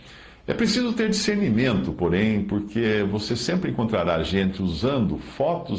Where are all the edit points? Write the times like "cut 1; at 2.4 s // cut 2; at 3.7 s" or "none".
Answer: none